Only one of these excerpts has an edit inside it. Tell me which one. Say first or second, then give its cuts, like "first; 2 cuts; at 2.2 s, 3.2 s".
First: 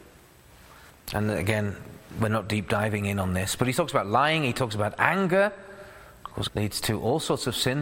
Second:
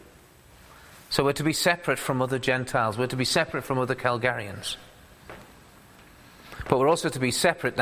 first; 2 cuts; at 0.9 s, 6.5 s